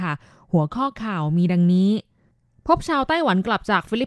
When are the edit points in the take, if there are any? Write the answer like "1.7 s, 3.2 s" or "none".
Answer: none